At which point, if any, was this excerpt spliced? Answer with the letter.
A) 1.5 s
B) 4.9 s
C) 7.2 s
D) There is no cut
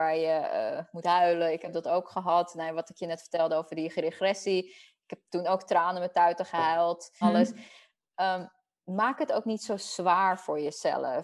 C